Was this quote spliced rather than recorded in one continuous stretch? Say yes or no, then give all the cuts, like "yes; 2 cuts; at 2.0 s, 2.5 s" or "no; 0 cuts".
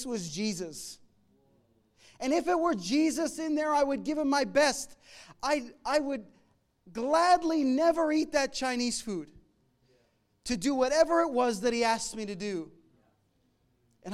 no; 0 cuts